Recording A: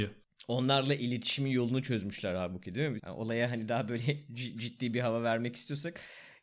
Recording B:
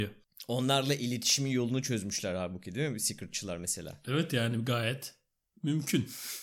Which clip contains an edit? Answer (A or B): A